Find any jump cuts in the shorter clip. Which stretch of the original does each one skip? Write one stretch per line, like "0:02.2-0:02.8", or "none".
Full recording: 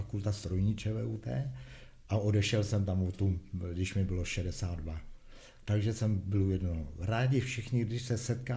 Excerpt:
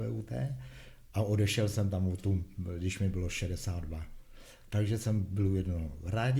none